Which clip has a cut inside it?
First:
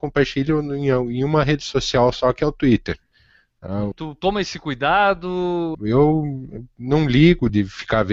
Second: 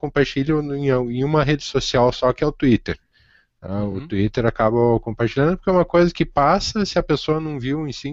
first; 2 cuts; at 3.9 s, 5.7 s

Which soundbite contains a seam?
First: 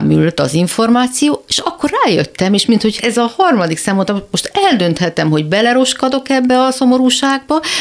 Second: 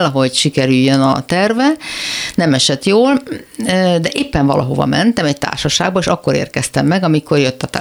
first; 1 cut; at 3.0 s

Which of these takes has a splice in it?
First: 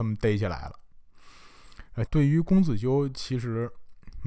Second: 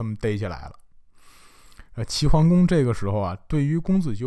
first; 1 cut; at 2.1 s

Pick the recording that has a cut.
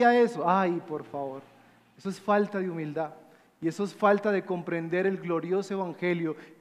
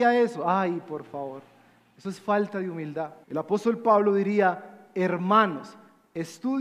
second; 1 cut; at 3.2 s

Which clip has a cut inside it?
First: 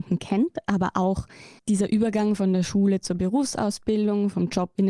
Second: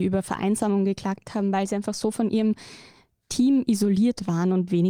first; 1 cut; at 1.6 s

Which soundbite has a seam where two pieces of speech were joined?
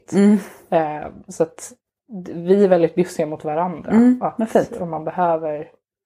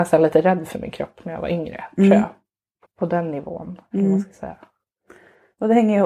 second; 1 cut; at 2.8 s

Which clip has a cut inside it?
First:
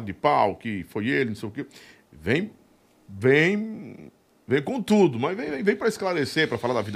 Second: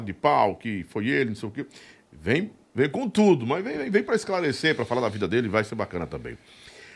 second; 1 cut; at 2.6 s

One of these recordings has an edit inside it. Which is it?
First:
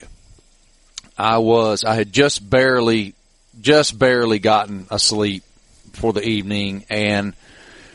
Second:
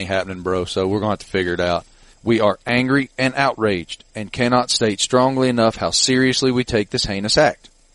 second; 1 cut; at 2.1 s

